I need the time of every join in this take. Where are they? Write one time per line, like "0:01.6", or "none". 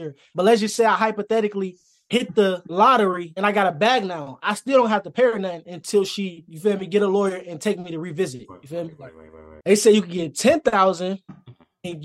0:09.6